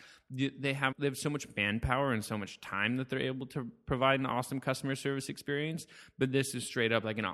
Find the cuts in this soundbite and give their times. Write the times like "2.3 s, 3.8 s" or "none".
0.9 s